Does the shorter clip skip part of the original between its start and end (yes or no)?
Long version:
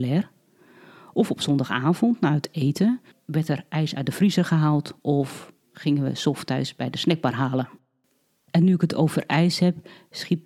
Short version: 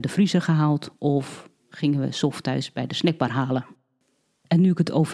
no